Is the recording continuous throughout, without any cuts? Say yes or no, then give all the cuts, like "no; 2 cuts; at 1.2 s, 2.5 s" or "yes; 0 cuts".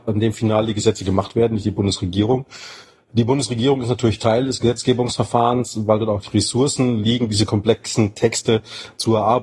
yes; 0 cuts